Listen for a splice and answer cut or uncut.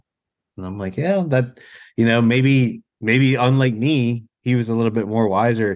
cut